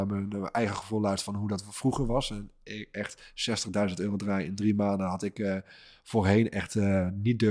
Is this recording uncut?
yes; 0 cuts

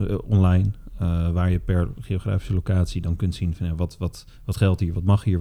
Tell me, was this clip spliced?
yes; 1 cut; at 4.3 s

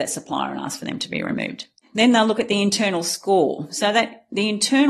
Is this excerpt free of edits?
yes; 0 cuts

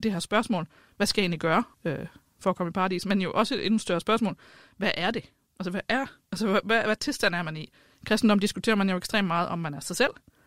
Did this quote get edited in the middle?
yes; 1 cut; at 1.7 s

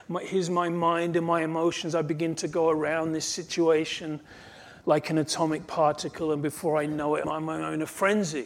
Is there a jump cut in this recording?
yes; 1 cut; at 7.2 s

